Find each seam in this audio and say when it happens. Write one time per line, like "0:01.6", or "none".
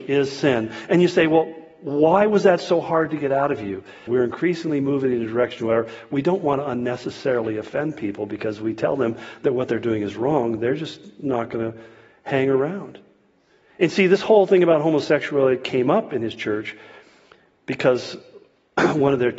0:04.1

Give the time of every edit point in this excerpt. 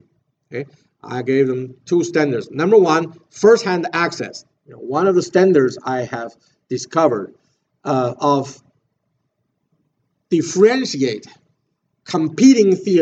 0:04.5

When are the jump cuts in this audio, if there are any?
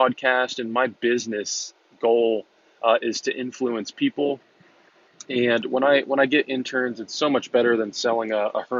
none

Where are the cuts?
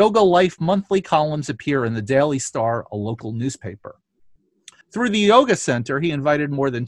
0:04.8

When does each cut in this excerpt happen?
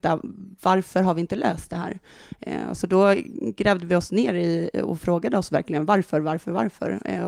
none

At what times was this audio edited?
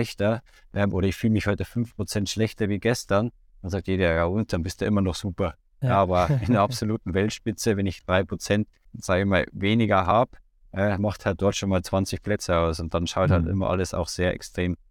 none

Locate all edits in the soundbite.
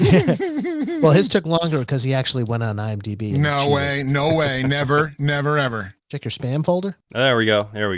none

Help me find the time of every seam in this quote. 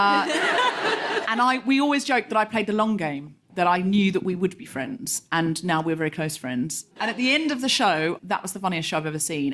0:07.0
0:08.2

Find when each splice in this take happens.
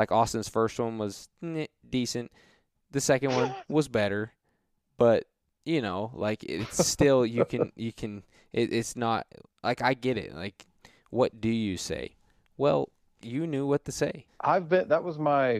0:13.2
0:14.3

